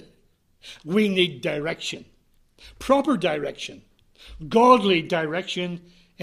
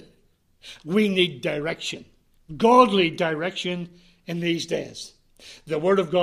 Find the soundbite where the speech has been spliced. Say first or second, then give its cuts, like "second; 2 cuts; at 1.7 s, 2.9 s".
second; 1 cut; at 2.5 s